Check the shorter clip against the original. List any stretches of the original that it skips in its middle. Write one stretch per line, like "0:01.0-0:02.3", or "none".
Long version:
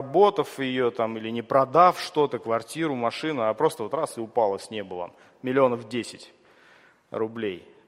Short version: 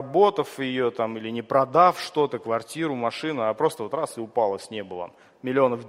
none